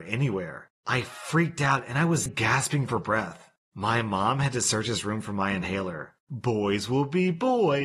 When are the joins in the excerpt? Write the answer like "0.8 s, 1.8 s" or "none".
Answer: 2.3 s, 6.2 s